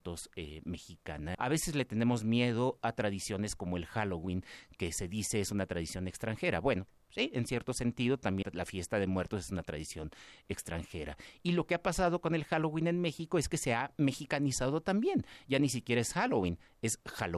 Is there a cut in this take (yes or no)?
yes